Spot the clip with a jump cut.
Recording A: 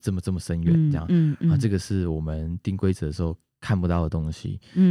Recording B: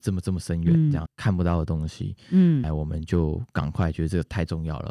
B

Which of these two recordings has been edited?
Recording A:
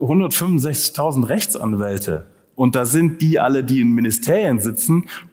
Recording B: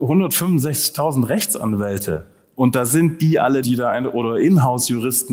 B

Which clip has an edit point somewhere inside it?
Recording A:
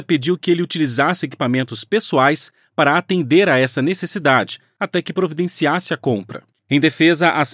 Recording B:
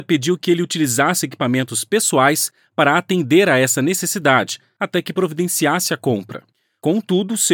A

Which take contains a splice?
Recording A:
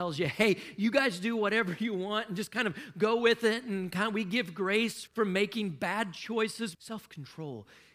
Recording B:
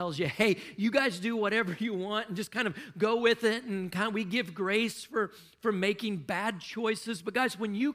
A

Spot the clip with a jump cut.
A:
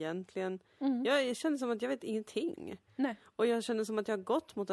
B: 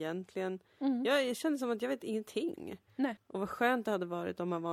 B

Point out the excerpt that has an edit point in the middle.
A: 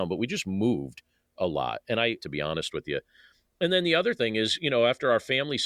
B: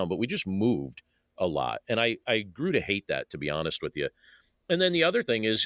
A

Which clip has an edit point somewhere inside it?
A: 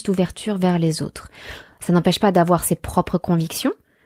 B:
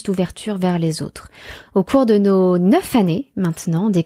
B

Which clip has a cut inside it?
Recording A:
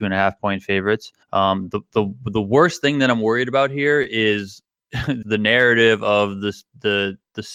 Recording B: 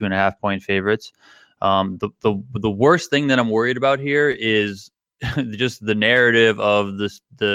A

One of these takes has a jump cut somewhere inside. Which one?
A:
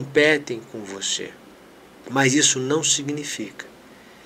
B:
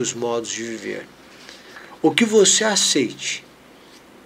A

